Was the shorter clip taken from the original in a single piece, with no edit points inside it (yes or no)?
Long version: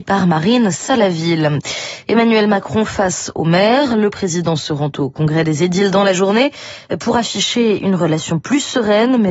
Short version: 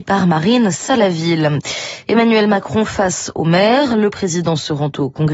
yes